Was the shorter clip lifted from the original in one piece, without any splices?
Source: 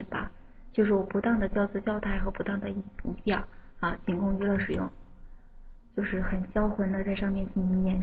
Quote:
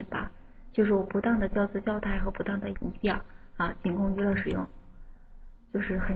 no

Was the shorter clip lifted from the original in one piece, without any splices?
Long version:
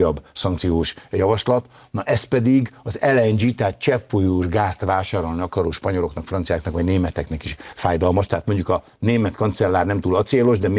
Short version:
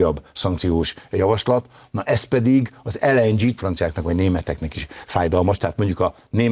no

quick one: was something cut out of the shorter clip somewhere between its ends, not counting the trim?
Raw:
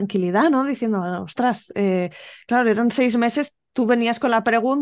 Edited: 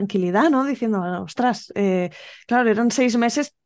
no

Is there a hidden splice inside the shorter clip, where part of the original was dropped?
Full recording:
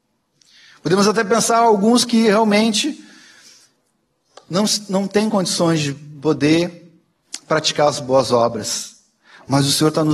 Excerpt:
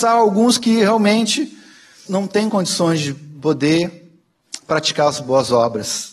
yes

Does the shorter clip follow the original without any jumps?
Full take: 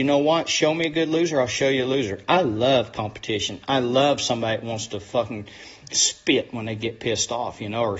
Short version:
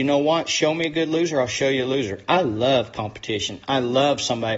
yes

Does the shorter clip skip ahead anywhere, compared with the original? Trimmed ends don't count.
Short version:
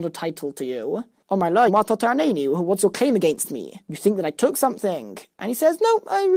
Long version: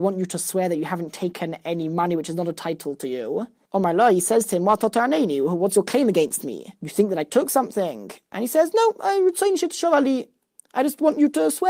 yes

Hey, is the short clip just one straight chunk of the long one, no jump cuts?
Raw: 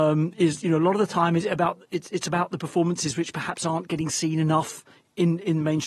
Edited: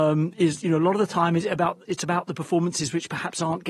no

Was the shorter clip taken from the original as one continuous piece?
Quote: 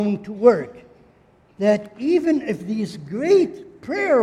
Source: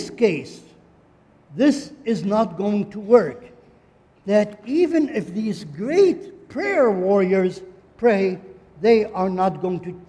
yes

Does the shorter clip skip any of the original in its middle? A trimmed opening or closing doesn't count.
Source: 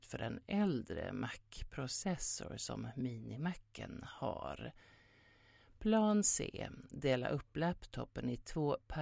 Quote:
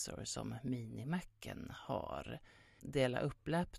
yes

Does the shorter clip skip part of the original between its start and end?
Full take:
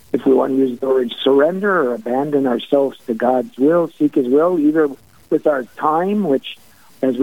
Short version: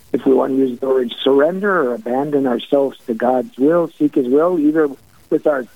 no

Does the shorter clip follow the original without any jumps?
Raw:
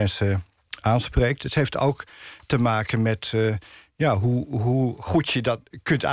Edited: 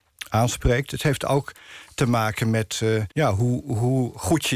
no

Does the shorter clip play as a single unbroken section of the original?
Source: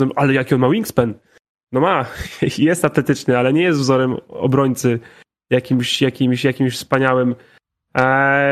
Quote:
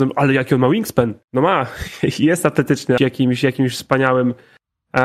no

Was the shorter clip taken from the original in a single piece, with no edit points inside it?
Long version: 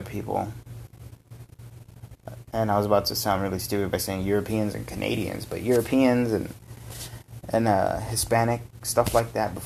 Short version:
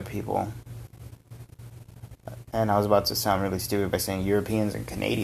yes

